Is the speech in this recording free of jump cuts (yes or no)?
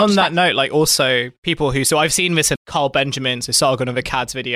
no